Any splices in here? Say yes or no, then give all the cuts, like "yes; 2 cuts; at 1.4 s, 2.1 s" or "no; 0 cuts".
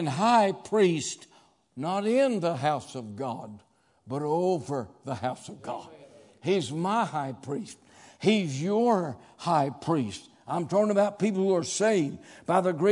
no; 0 cuts